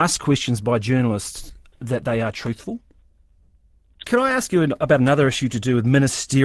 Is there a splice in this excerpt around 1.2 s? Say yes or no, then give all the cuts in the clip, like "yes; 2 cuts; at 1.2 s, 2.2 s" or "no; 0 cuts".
no; 1 cut; at 4.0 s